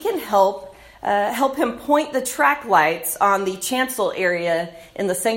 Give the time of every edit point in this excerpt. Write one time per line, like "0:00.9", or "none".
none